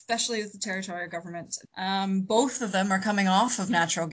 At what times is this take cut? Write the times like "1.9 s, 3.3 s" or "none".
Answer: 1.6 s